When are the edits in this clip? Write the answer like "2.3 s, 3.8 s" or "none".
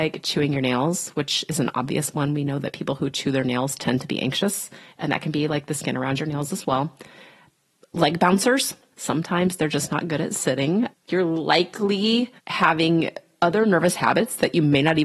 8.9 s, 10.9 s, 12.4 s